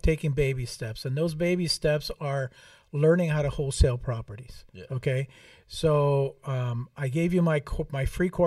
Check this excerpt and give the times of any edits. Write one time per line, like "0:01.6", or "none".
none